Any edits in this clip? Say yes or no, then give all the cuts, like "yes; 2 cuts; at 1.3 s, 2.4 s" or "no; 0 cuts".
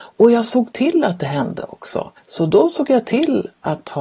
yes; 1 cut; at 2.2 s